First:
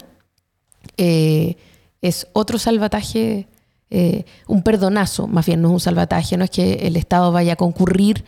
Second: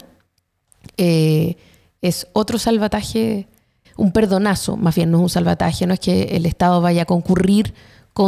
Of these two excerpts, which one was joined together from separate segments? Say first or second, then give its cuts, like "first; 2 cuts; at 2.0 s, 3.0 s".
second; 1 cut; at 3.8 s